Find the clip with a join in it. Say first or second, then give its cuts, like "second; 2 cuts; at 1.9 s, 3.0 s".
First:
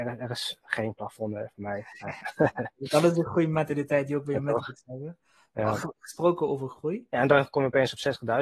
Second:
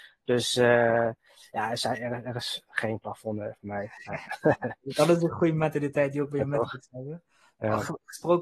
first; 1 cut; at 7.1 s